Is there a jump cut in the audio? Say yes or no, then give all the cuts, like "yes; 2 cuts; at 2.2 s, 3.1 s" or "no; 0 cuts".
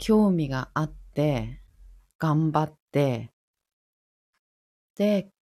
no; 0 cuts